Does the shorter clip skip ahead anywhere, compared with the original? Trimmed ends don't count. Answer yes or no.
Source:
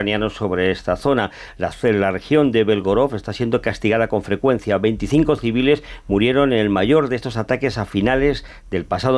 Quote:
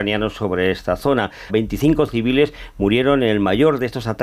yes